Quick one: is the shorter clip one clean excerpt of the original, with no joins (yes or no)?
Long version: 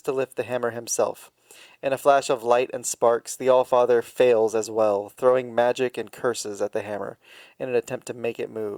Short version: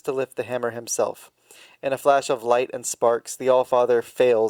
yes